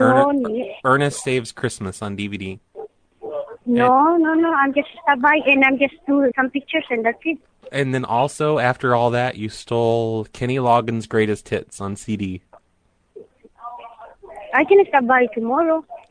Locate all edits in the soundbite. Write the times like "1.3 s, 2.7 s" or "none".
6.3 s